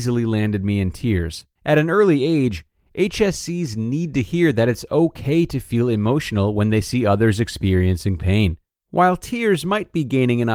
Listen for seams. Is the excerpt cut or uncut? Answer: cut